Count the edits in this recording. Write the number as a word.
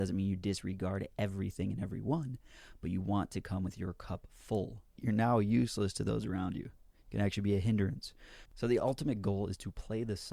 two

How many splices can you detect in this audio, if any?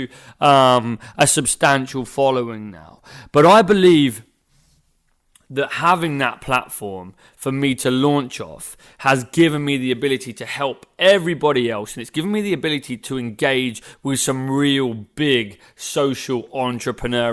zero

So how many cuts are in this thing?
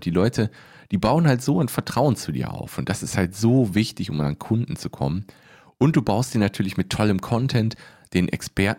zero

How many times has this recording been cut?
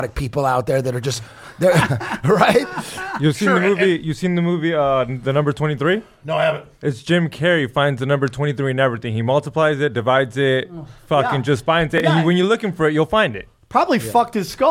zero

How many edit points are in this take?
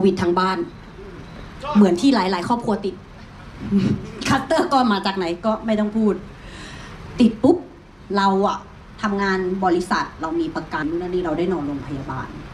one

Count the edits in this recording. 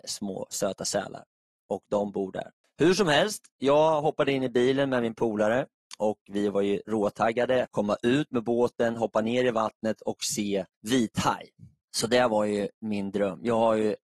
three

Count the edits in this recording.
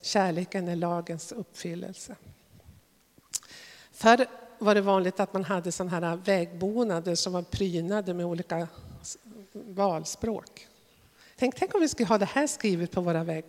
one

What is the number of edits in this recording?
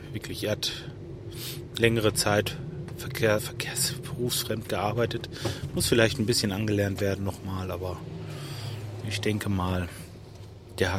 one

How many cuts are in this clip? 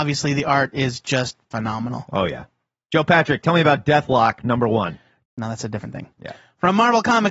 two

